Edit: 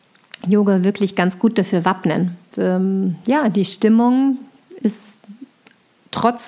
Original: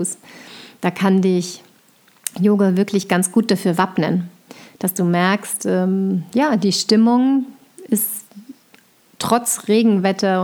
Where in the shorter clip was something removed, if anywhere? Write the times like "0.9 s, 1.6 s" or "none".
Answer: 2.5 s